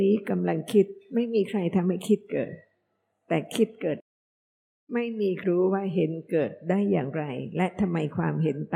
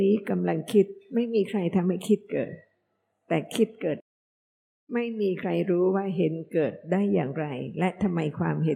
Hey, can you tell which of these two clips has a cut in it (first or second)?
first